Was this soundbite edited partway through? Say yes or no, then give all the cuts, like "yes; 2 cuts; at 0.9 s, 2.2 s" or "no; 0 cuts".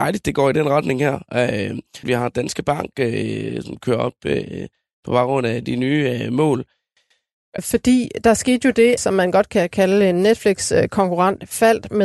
yes; 3 cuts; at 2.0 s, 7.6 s, 9.0 s